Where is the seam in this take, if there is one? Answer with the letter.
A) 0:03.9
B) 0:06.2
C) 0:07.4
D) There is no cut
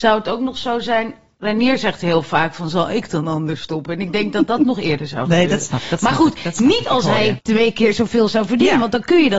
C